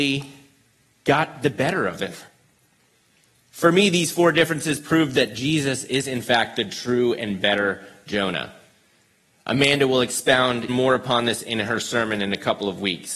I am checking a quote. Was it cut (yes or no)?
yes